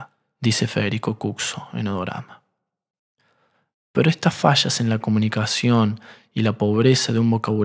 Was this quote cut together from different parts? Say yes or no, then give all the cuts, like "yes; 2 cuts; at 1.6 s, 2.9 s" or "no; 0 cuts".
no; 0 cuts